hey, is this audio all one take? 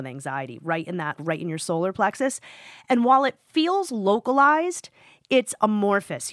no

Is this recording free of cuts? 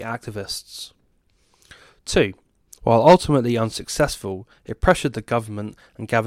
no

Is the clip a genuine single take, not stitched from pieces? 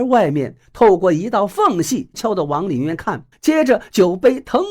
no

